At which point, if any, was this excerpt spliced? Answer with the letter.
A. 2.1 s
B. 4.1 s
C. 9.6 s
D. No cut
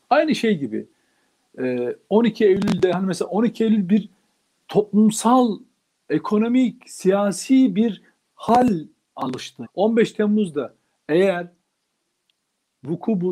C